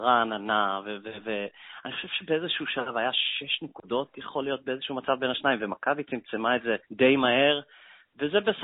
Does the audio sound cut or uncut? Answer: cut